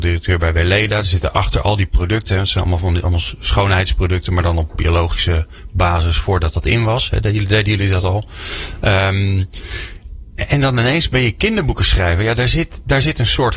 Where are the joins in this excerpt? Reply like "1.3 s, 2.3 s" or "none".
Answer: none